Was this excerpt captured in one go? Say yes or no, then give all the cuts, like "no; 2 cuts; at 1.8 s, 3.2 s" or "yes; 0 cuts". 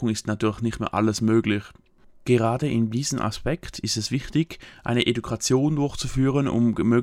yes; 0 cuts